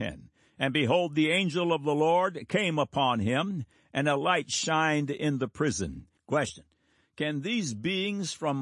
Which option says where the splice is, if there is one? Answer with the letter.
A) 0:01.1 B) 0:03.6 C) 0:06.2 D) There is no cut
C